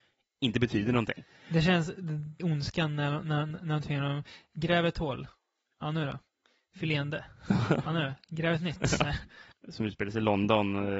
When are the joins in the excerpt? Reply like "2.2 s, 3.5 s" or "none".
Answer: 2.4 s, 9.5 s

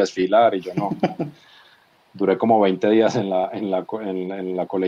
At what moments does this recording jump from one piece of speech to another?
none

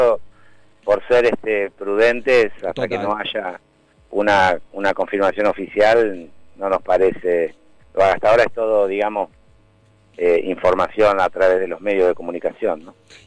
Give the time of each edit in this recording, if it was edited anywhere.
none

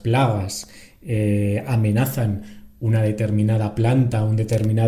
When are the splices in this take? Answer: none

